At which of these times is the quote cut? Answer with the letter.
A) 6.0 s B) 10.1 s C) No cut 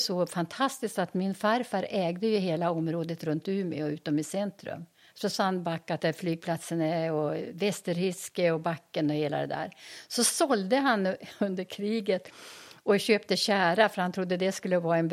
A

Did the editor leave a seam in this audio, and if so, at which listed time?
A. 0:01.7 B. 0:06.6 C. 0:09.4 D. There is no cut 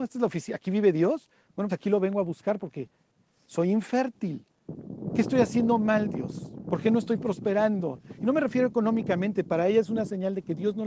A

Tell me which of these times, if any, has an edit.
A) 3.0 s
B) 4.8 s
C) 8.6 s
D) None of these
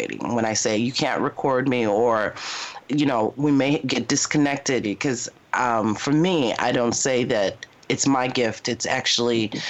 B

